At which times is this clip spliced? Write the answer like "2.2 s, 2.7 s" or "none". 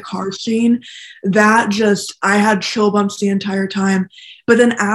none